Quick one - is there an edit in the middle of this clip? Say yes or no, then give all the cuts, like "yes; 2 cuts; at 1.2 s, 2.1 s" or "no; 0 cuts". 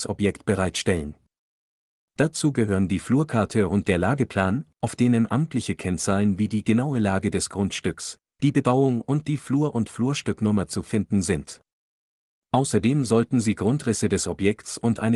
no; 0 cuts